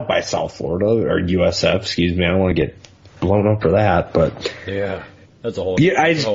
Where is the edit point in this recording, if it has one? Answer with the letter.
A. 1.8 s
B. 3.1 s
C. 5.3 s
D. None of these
C